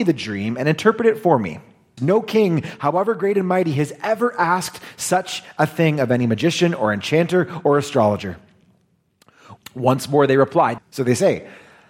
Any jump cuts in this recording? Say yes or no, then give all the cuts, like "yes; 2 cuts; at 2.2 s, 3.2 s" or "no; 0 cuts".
yes; 3 cuts; at 2.0 s, 9.6 s, 10.8 s